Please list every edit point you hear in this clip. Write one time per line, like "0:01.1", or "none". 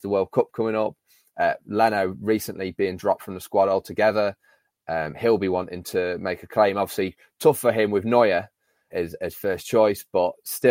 0:08.9

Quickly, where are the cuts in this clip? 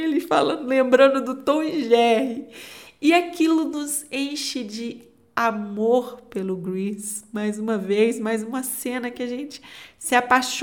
none

